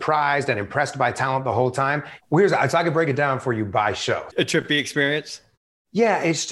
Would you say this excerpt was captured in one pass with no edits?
no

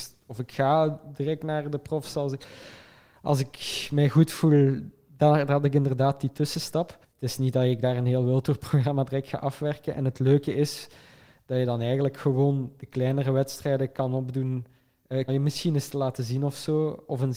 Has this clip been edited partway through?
yes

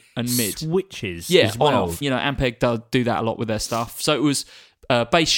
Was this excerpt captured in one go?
no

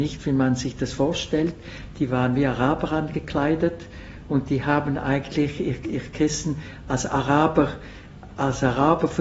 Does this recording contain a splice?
yes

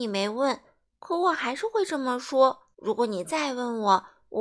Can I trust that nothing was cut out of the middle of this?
no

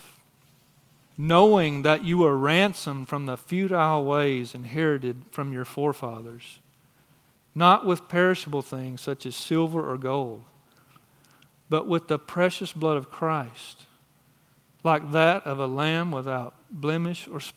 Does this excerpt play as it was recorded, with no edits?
no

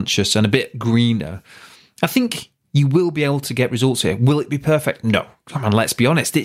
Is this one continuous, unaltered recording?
yes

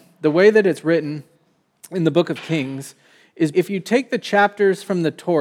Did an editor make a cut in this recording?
yes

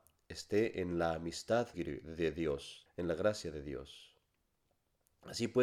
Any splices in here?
yes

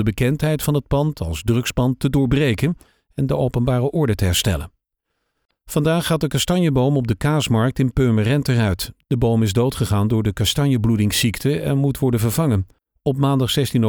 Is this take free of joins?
yes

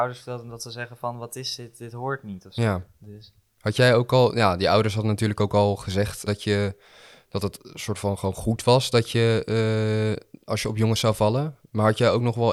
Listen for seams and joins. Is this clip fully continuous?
no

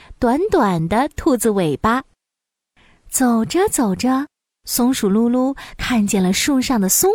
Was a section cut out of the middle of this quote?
no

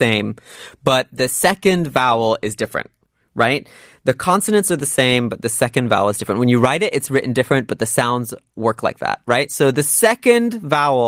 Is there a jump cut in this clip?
no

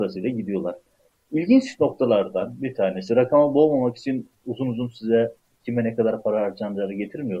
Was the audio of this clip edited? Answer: no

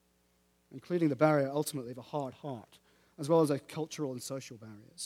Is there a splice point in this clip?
no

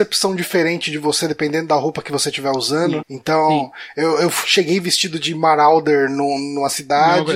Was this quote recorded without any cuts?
no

